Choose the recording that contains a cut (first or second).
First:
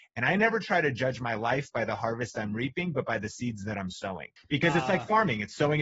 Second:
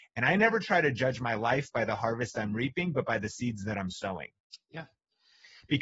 first